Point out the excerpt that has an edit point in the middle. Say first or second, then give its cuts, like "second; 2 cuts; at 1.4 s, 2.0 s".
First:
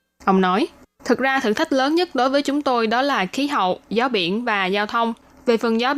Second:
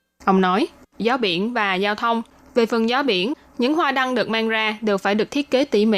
second; 1 cut; at 0.9 s